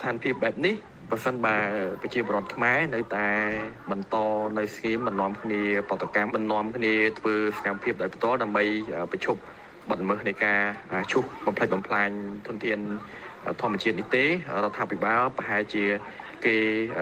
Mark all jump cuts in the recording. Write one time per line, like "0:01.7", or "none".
0:06.3